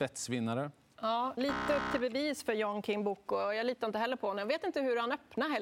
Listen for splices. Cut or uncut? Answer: cut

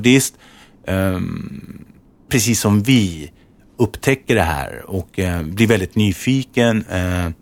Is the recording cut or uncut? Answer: cut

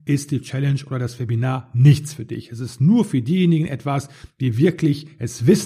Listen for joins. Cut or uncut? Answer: uncut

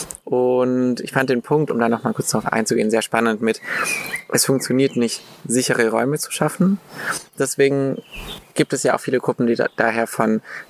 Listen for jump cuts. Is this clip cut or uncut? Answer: uncut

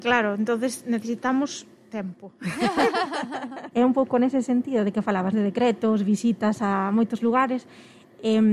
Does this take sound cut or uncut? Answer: cut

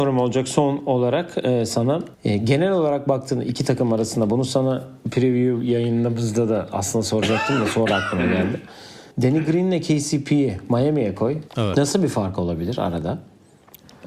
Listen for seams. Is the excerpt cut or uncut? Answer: cut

